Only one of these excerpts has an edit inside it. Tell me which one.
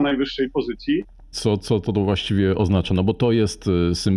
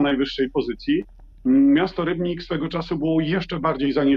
first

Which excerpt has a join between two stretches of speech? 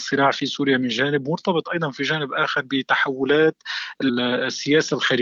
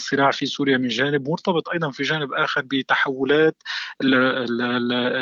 first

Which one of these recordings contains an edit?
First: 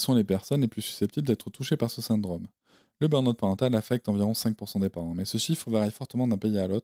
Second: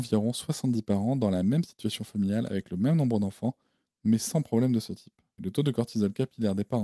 second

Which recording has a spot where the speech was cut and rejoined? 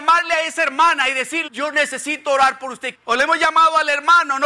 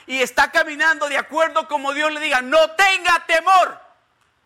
first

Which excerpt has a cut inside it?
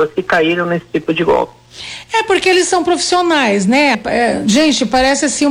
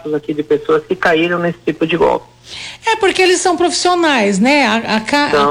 first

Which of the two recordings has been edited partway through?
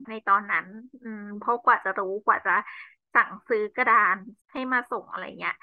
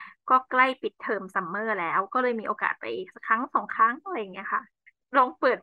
first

